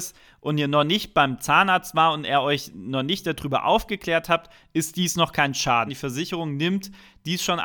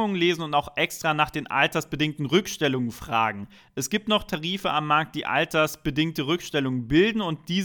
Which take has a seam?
first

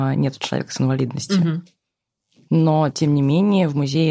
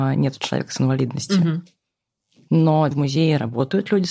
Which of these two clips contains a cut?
second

